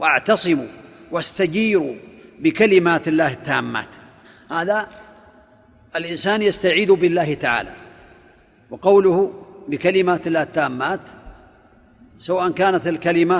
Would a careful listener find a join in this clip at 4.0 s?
no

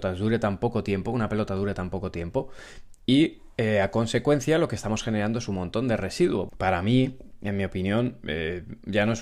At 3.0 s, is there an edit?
no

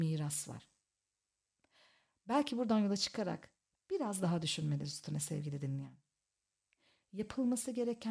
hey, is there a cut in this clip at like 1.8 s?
no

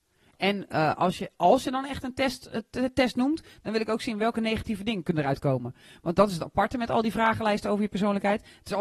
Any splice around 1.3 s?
no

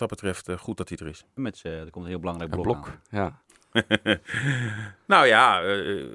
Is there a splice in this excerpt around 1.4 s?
yes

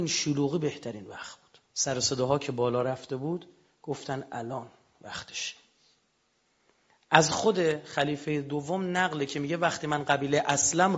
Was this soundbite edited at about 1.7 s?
yes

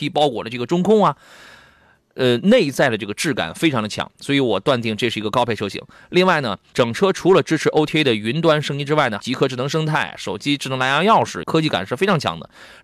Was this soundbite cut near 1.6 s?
no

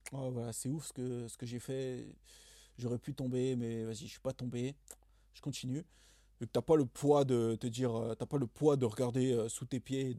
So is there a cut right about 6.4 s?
yes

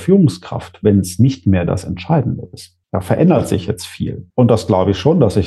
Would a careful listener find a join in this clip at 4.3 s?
yes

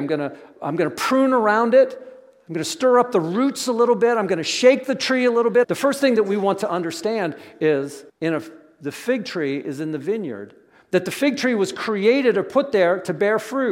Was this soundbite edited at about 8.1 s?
yes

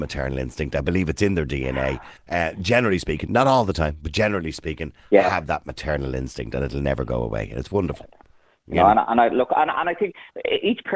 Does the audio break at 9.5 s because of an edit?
no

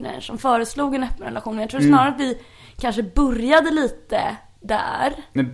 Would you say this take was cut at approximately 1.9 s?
no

